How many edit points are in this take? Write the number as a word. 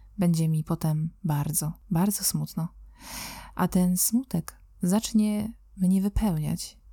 zero